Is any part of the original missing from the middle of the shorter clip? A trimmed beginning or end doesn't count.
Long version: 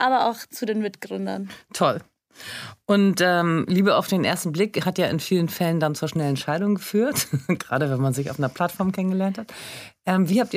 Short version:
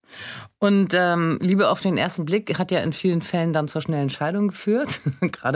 no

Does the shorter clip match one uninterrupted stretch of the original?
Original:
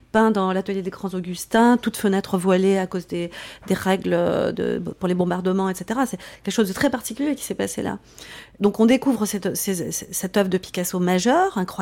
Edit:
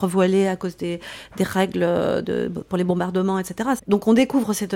no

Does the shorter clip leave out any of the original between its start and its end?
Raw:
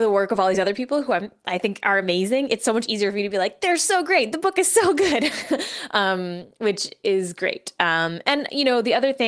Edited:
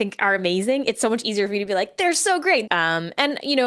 yes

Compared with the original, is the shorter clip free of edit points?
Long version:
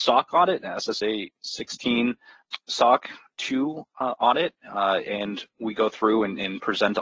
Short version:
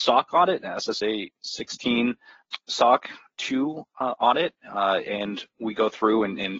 yes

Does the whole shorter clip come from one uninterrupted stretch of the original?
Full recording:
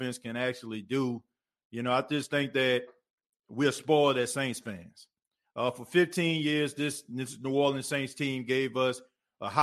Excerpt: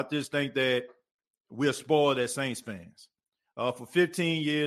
yes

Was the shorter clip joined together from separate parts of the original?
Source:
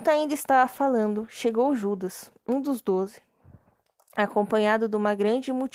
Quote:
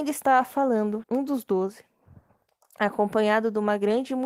yes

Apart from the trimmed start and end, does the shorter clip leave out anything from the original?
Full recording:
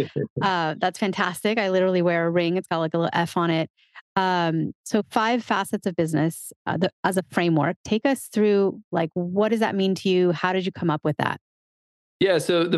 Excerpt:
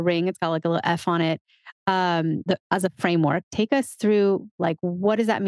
yes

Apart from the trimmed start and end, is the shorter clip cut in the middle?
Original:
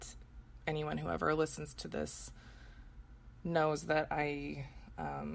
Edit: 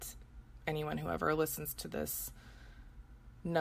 no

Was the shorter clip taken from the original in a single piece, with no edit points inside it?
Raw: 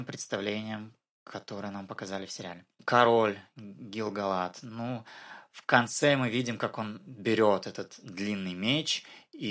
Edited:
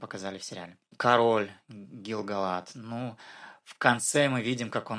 yes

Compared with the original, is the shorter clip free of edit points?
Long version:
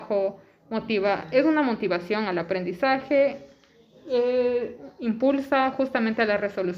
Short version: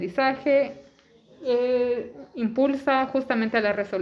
yes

